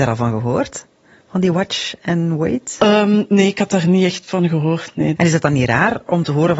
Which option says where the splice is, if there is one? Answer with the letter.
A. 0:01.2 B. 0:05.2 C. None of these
B